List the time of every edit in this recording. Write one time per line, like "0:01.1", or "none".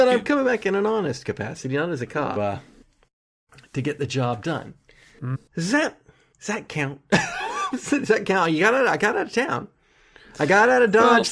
0:02.4
0:05.3